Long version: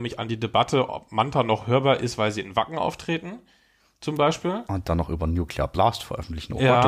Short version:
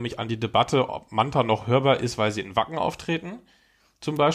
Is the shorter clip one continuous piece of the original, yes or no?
yes